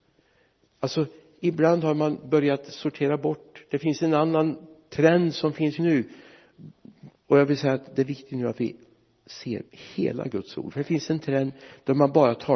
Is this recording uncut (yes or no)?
no